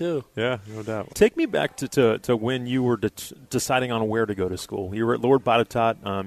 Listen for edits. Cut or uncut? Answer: cut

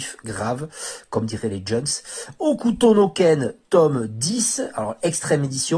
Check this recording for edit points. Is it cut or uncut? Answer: uncut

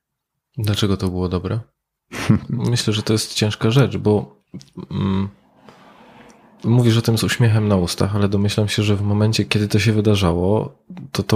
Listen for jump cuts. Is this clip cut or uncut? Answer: cut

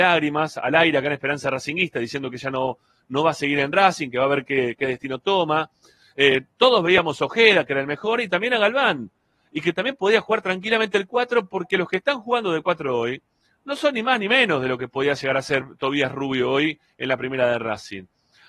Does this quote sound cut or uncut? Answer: uncut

